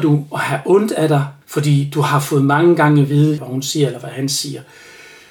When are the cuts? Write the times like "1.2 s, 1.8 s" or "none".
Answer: 1.4 s, 3.4 s